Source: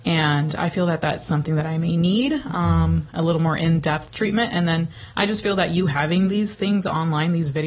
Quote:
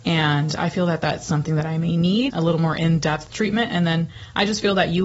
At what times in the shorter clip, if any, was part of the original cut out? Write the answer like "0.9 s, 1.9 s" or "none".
2.3 s